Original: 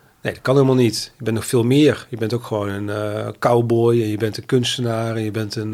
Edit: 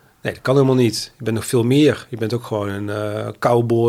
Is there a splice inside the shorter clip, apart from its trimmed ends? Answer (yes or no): no